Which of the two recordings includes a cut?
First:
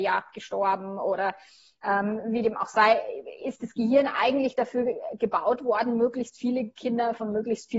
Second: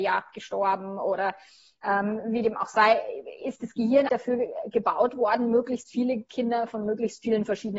second; 1 cut; at 4.1 s

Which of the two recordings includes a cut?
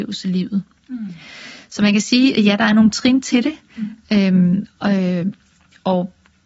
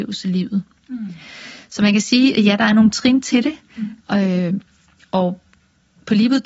second; 1 cut; at 4.0 s

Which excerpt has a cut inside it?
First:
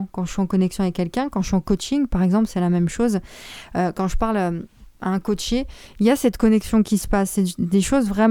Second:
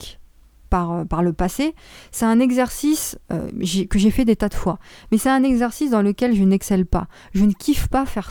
second; 1 cut; at 3.2 s

